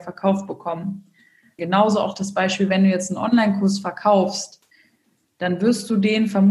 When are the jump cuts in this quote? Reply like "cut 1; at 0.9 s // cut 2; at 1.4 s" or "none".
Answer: cut 1; at 1.6 s